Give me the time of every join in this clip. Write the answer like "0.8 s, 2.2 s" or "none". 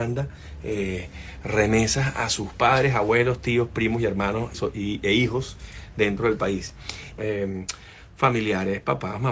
4.5 s, 7.2 s

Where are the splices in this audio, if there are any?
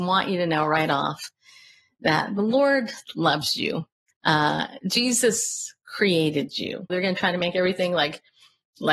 4.1 s, 6.9 s

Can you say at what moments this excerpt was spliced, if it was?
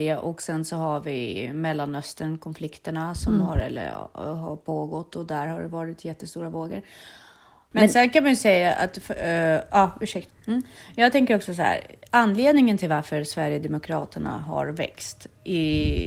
7.7 s, 10.3 s

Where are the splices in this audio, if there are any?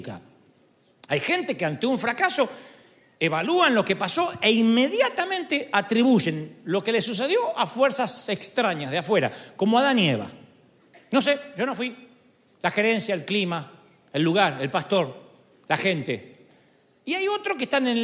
none

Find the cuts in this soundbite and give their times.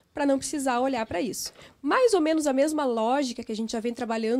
none

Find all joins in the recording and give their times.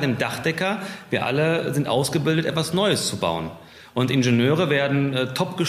none

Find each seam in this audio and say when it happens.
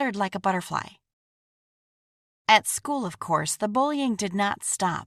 none

